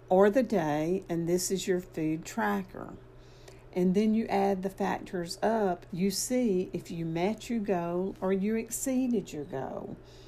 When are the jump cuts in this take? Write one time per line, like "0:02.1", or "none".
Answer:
0:03.7
0:05.9